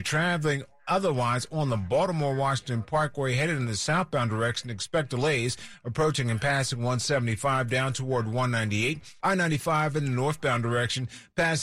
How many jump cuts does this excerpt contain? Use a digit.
1